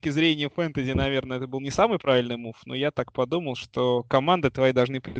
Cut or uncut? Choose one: uncut